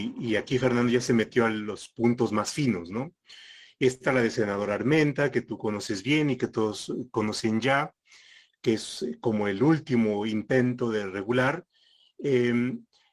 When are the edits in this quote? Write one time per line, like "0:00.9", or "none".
none